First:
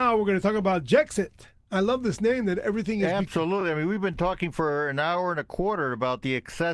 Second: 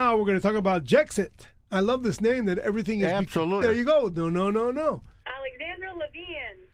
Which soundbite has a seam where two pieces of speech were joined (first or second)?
second